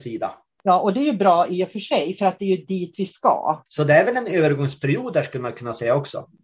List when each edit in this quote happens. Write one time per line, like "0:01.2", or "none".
0:03.7

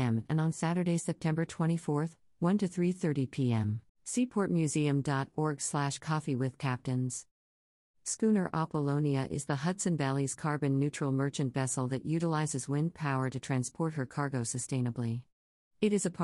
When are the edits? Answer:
0:03.9

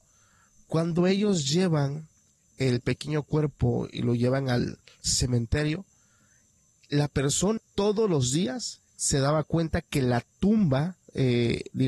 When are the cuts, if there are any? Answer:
0:07.6
0:08.9

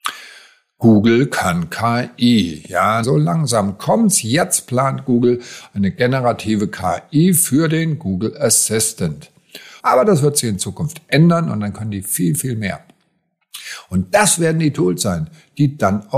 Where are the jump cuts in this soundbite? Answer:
0:03.0
0:09.8

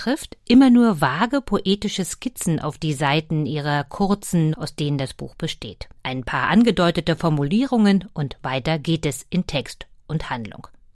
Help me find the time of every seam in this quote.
0:04.5
0:06.0

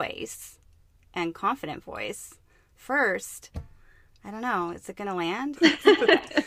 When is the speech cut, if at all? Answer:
0:05.5

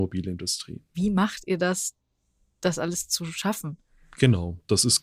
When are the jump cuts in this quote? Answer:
0:00.9

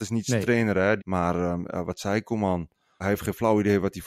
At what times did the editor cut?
0:01.0
0:03.0

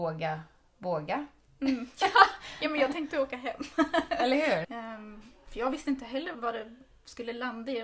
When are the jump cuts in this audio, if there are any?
0:04.6
0:06.3

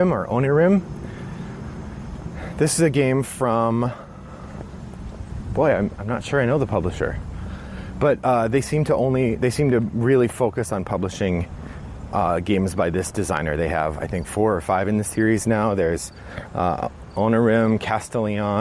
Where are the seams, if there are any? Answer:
none

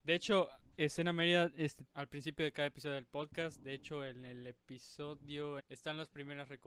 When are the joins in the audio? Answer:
0:01.9
0:05.6

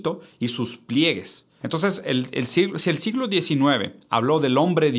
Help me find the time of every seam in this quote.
0:01.6

